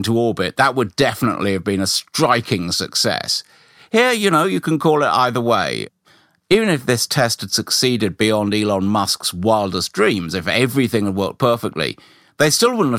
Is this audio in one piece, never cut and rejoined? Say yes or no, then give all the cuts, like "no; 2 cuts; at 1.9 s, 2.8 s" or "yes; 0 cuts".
yes; 0 cuts